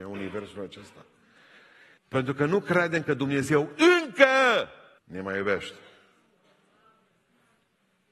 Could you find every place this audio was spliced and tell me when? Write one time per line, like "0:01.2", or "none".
0:02.0
0:05.0